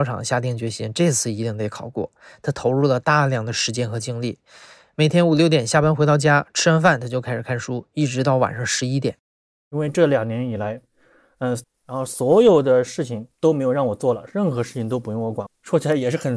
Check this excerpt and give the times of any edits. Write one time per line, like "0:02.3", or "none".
0:11.6
0:13.3
0:15.5